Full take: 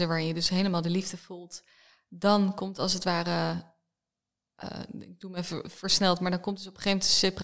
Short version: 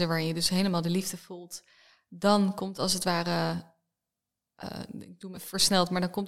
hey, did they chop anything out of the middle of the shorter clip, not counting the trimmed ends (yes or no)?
yes